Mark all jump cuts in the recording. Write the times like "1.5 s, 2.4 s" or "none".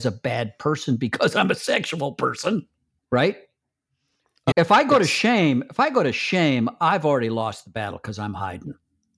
3.0 s, 4.5 s